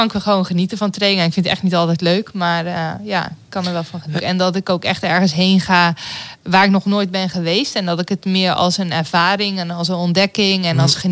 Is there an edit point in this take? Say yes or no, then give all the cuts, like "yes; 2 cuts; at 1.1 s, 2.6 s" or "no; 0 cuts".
yes; 1 cut; at 4.2 s